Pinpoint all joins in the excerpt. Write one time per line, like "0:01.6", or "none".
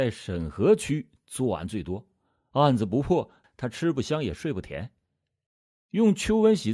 none